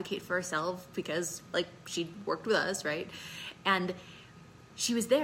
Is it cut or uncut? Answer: uncut